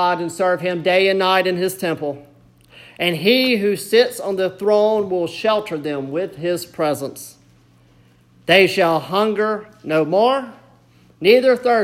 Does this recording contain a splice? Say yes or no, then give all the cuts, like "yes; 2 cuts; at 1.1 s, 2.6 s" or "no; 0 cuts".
no; 0 cuts